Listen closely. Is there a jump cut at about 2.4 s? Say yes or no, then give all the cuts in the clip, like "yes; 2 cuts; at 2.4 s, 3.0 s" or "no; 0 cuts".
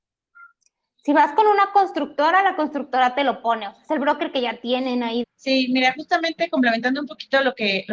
no; 1 cut; at 5.2 s